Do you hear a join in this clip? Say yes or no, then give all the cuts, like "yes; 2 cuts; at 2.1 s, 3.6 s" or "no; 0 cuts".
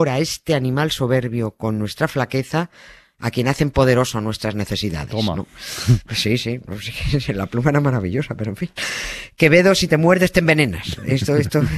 no; 0 cuts